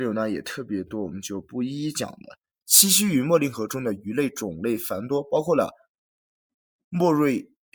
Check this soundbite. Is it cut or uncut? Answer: cut